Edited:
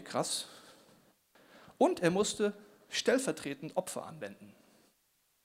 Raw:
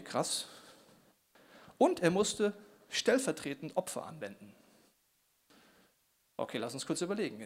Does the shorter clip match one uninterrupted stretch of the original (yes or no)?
yes